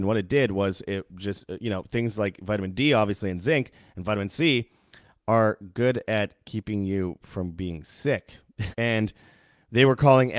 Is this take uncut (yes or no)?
no